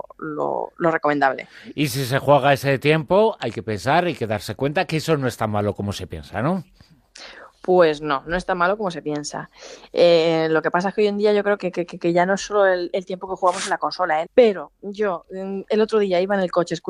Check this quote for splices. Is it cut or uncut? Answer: cut